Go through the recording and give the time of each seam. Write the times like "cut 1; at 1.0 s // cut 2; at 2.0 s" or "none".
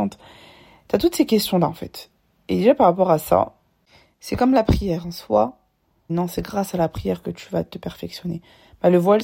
cut 1; at 6.1 s

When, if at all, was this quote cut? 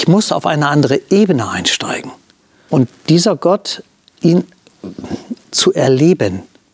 cut 1; at 2.7 s // cut 2; at 5.4 s

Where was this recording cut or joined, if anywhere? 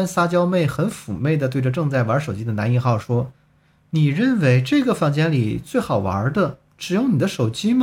none

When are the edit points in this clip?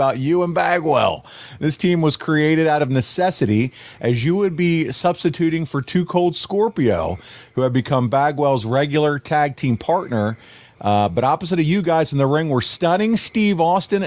none

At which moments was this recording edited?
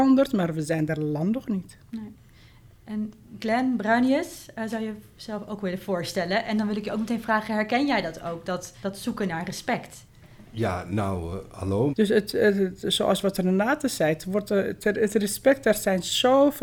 cut 1; at 8.8 s // cut 2; at 11.9 s

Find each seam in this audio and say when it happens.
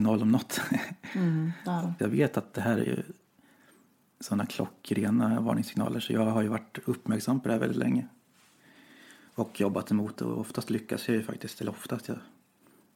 cut 1; at 2.0 s

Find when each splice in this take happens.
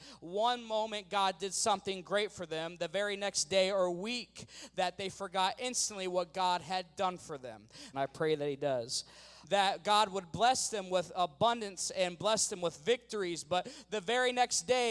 cut 1; at 7.9 s // cut 2; at 9.4 s

